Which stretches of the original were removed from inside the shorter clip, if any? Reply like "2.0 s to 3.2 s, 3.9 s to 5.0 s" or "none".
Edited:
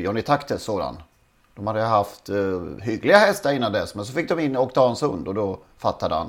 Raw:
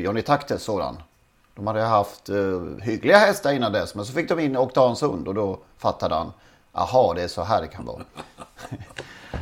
none